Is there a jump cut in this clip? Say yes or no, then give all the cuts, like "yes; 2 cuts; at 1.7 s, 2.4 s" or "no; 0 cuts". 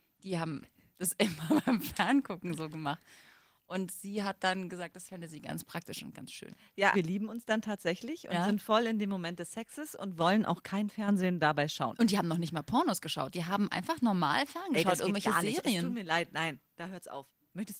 yes; 1 cut; at 6.9 s